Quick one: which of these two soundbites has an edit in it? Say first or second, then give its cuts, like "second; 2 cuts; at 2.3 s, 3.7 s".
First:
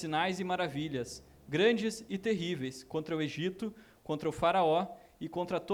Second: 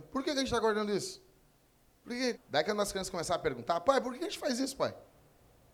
second; 1 cut; at 2.3 s